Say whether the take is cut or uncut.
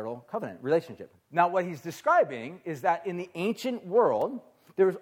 cut